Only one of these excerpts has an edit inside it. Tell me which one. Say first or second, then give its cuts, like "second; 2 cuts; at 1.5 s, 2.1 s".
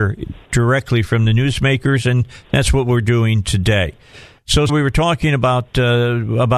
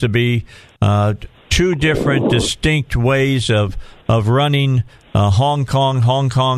first; 1 cut; at 4.7 s